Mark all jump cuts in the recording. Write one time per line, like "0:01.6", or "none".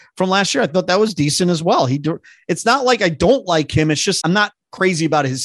0:04.2